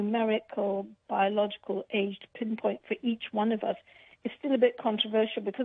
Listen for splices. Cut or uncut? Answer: uncut